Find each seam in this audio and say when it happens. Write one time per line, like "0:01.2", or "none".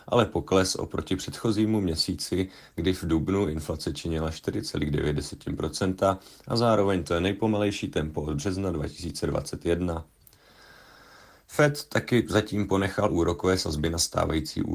none

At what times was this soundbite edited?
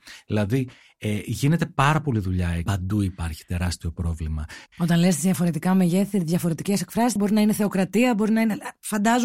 0:02.7
0:04.7
0:07.2

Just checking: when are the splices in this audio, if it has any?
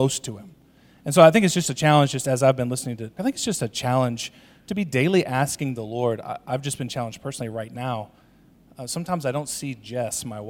0:03.2

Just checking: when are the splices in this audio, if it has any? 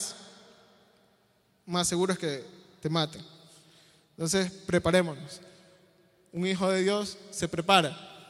none

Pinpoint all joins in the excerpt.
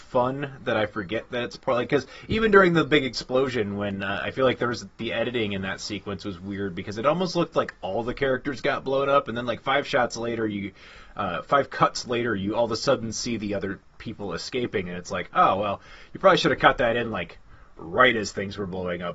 none

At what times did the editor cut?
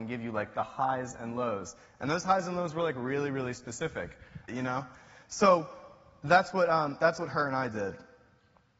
0:04.5

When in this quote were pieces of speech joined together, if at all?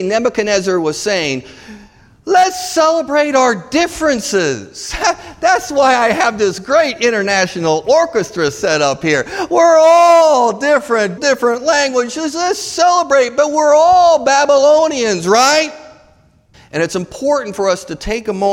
0:11.2
0:16.5

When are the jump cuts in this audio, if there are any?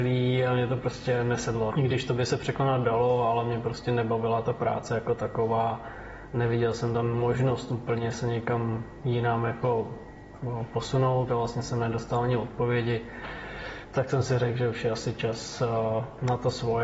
0:01.7
0:11.3

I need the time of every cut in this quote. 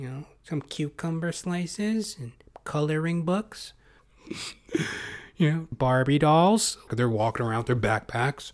0:04.0
0:05.7
0:06.9

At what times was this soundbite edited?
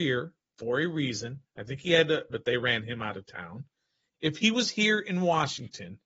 0:02.3
0:04.1

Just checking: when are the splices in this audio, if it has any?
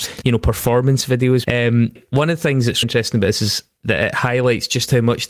0:01.4
0:02.8

